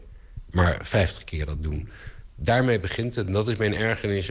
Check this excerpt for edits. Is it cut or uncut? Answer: uncut